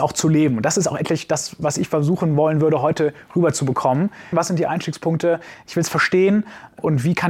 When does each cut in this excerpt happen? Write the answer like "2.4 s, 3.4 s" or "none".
4.3 s